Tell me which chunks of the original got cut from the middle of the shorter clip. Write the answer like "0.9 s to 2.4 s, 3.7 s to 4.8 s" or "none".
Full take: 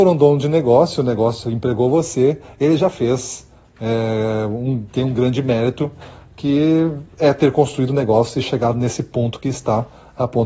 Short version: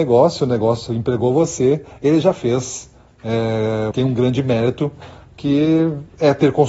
4.5 s to 4.9 s